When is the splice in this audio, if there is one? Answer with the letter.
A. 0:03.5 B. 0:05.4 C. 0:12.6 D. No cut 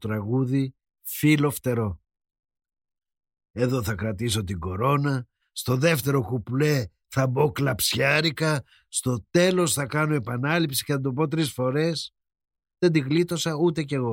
B